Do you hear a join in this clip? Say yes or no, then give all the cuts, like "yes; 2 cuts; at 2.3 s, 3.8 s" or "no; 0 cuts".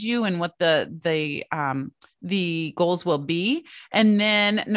yes; 1 cut; at 2.1 s